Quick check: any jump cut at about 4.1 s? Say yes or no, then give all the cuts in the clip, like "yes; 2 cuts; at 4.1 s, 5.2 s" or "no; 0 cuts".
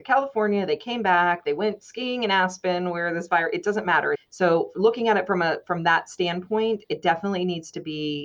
yes; 1 cut; at 4.1 s